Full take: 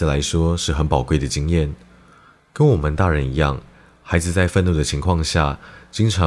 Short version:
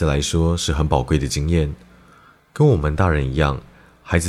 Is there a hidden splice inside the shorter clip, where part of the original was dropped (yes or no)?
no